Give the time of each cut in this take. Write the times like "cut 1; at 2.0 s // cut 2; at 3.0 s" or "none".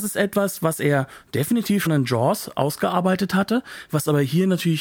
cut 1; at 1.9 s